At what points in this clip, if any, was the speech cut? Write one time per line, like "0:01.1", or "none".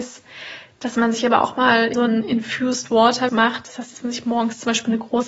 0:01.9
0:03.3